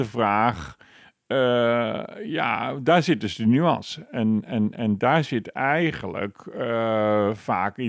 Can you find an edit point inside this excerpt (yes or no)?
no